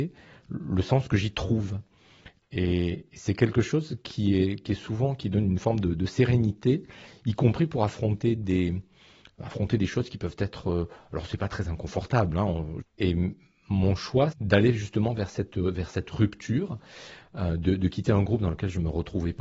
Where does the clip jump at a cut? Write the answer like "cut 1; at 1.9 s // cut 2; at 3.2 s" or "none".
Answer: cut 1; at 12.8 s // cut 2; at 14.3 s